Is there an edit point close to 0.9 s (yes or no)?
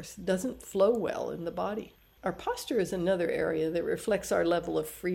no